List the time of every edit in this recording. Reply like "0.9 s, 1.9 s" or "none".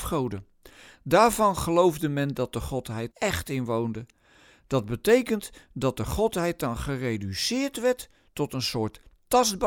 3.1 s